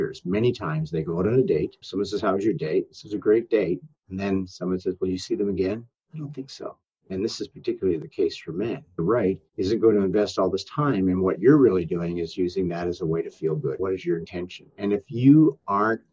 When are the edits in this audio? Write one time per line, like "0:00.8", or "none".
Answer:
0:01.8
0:09.0
0:13.8